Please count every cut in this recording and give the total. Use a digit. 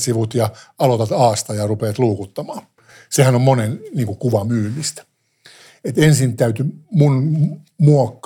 0